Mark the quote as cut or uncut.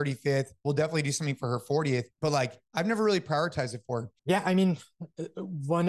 cut